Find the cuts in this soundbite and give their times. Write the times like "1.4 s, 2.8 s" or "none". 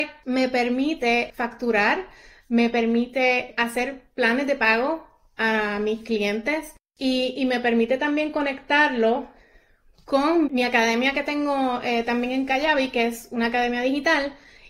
10.5 s